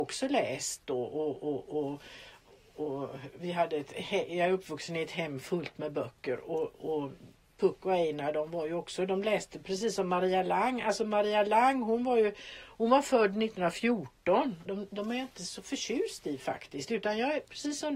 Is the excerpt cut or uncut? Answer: cut